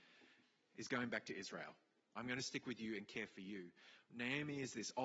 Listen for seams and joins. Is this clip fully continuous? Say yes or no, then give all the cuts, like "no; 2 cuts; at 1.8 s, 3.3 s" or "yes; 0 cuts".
no; 1 cut; at 2.0 s